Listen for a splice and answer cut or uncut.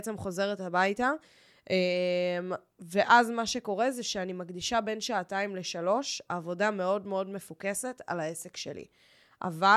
uncut